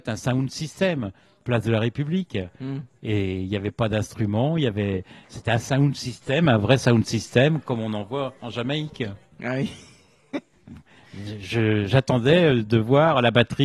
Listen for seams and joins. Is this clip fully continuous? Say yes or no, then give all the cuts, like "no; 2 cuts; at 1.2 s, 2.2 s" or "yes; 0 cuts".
yes; 0 cuts